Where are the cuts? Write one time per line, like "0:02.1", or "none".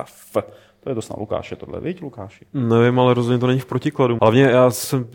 0:04.2